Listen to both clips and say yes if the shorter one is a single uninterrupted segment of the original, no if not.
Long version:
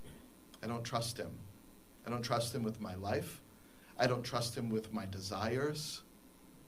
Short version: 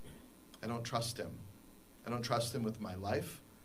yes